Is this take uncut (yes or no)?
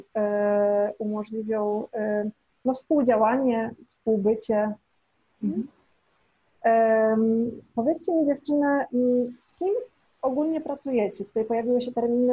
yes